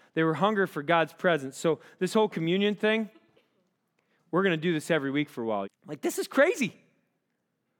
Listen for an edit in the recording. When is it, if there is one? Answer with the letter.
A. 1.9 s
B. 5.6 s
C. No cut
B